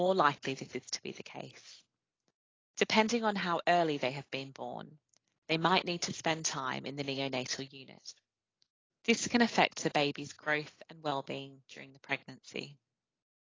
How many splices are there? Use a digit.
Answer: 1